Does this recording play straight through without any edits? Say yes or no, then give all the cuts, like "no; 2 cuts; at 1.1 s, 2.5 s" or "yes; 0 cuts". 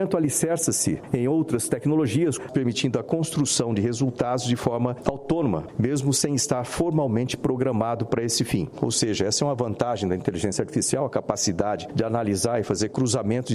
yes; 0 cuts